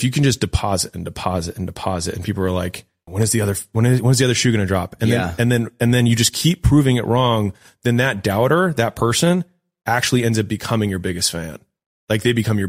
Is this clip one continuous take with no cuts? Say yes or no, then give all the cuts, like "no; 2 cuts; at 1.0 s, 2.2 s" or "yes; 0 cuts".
no; 1 cut; at 3.1 s